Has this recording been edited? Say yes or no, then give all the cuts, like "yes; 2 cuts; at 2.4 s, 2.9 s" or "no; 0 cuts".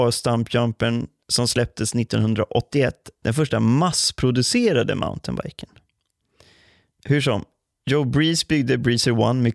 no; 0 cuts